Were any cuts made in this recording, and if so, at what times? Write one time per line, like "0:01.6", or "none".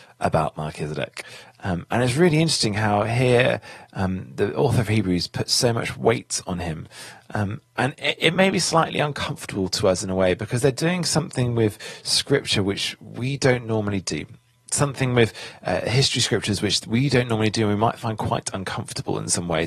none